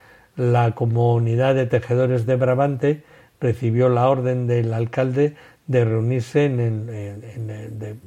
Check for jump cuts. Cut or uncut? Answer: uncut